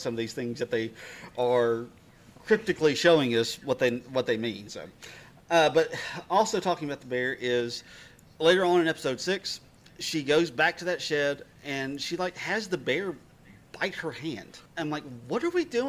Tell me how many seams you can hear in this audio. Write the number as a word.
one